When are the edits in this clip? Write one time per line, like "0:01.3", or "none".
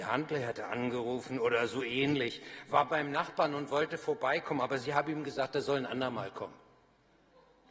none